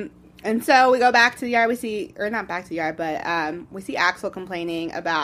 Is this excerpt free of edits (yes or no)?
yes